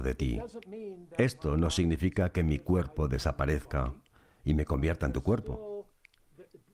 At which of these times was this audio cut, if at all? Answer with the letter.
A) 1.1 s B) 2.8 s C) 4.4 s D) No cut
D